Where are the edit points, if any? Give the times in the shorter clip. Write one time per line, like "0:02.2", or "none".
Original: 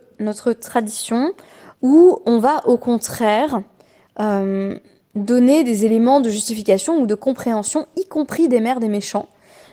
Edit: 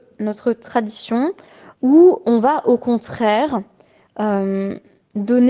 none